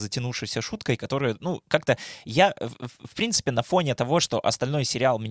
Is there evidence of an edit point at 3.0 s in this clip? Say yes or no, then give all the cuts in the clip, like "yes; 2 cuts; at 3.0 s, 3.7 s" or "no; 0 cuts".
no; 0 cuts